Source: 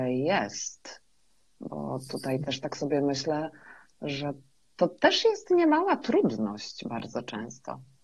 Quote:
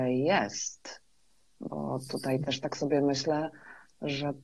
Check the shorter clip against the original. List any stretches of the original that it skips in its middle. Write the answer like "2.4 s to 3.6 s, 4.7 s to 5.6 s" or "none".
none